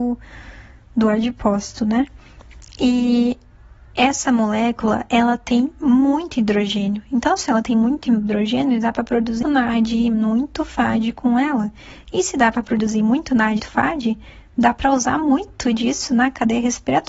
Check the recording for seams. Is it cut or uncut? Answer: cut